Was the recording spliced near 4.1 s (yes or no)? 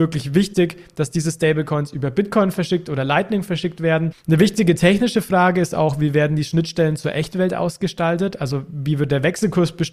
yes